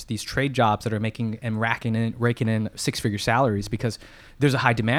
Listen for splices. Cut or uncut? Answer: uncut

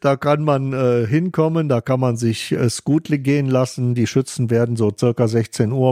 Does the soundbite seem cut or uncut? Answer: uncut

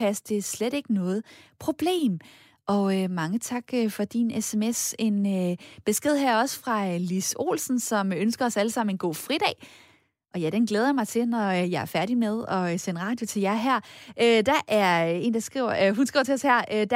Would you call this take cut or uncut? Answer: uncut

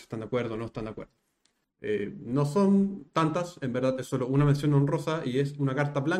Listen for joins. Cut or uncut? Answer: cut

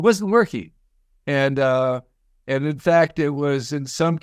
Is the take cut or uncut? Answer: uncut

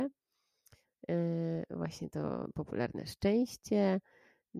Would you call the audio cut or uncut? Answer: uncut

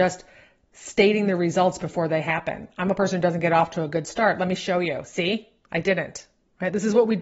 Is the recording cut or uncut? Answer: uncut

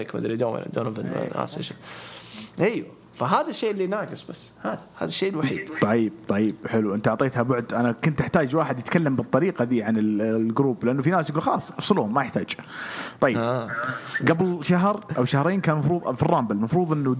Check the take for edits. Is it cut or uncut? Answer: uncut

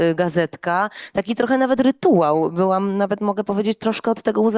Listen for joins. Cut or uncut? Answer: uncut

